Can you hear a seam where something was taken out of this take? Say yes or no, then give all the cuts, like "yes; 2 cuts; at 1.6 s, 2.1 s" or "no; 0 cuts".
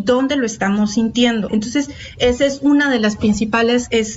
yes; 1 cut; at 1.5 s